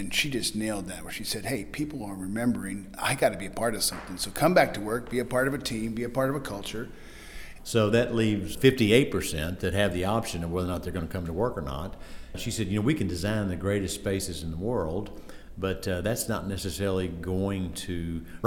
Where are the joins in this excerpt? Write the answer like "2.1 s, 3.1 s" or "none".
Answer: 7.6 s